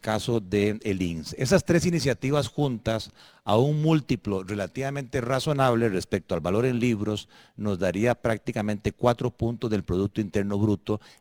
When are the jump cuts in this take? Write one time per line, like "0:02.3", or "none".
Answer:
none